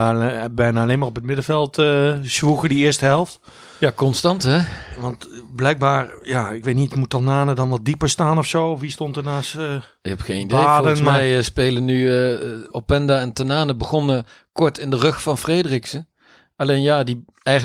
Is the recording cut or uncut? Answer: uncut